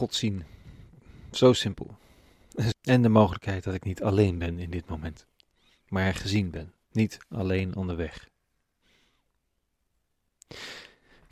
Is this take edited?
yes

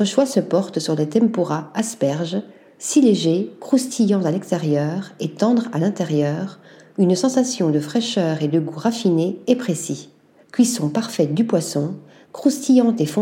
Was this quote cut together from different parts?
yes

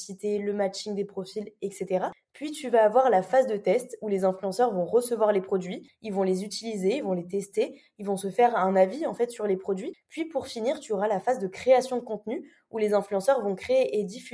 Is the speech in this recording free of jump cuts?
yes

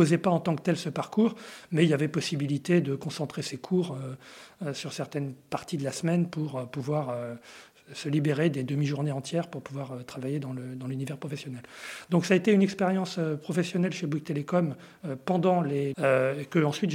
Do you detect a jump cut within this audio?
yes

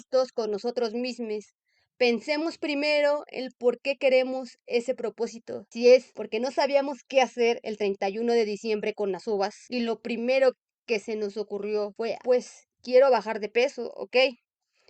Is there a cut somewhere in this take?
yes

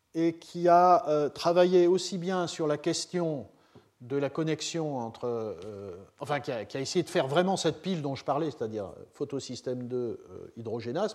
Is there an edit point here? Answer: no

